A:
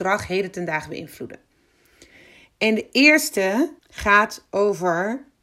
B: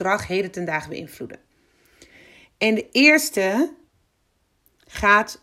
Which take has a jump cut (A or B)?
A